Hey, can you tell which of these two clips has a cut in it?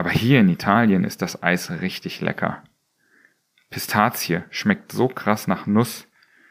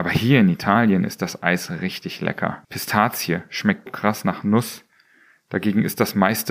second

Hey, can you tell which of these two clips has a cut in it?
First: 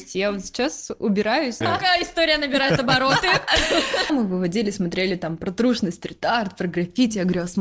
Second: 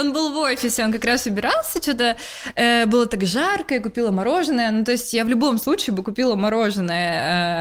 first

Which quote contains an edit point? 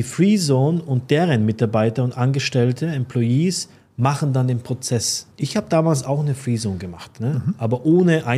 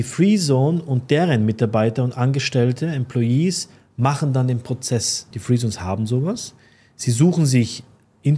second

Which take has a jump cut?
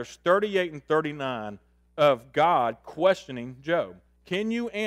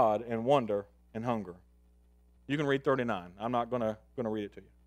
second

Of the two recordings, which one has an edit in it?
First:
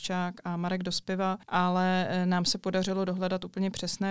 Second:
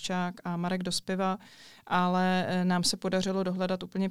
first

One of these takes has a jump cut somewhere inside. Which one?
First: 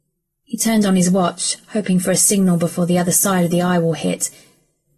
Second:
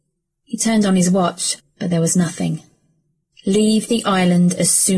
second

